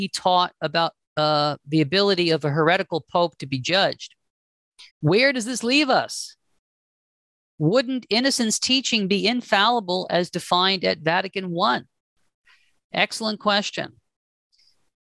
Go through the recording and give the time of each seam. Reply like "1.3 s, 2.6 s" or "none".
1.0 s, 4.9 s